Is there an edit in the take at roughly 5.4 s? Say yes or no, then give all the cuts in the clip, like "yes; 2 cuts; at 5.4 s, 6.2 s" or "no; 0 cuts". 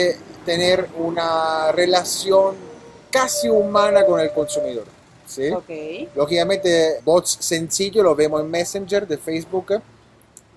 no; 1 cut; at 7.0 s